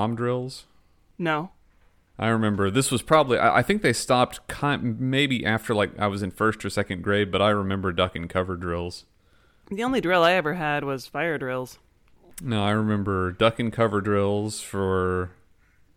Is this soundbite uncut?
yes; 0 cuts

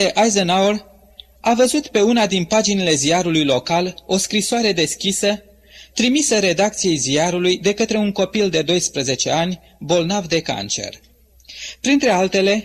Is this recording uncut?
yes; 0 cuts

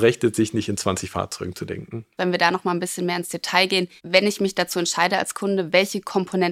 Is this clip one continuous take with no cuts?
no; 2 cuts; at 2.2 s, 4.0 s

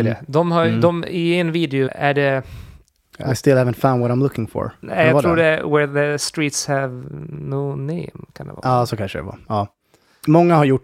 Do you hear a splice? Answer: yes; 1 cut; at 1.9 s

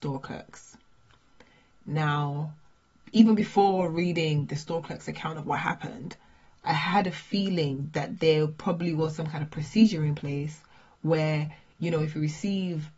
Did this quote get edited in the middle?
no; 0 cuts

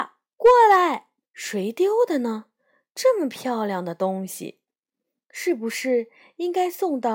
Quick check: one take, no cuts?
no; 1 cut; at 1.2 s

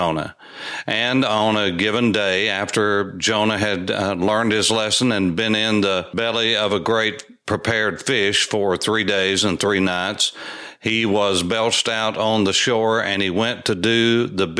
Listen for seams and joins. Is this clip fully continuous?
yes; 0 cuts

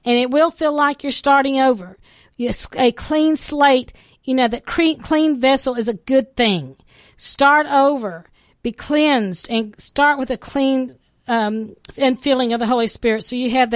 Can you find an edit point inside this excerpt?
no; 0 cuts

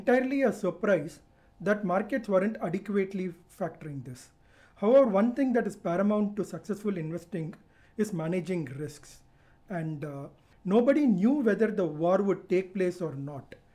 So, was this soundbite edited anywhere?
yes; 1 cut; at 10.5 s

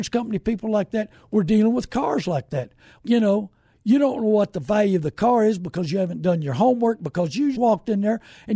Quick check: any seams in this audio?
yes; 2 cuts; at 3.0 s, 7.5 s

